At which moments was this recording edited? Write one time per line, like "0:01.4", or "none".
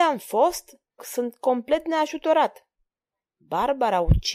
0:01.0